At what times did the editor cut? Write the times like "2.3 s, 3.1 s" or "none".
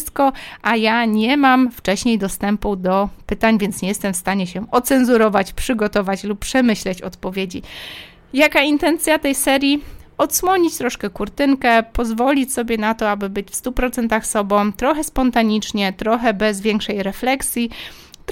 none